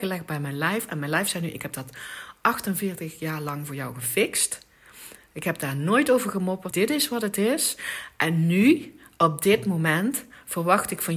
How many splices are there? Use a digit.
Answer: 1